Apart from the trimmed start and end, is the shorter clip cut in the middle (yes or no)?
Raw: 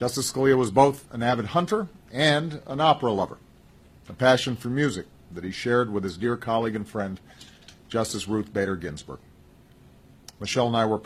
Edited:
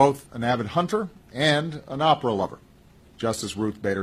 yes